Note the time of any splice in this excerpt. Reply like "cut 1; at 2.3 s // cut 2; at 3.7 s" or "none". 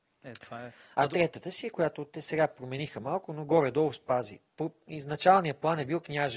none